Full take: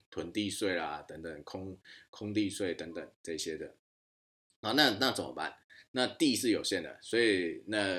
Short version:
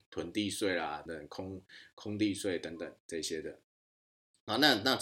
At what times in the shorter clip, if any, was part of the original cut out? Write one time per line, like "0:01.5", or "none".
0:01.1